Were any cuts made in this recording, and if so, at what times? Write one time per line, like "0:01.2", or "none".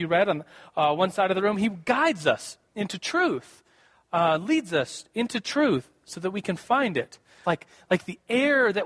0:07.4